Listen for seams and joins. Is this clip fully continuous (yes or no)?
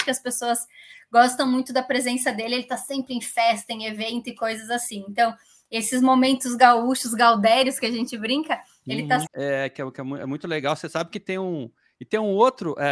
no